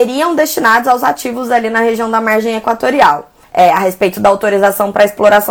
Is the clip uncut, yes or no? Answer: no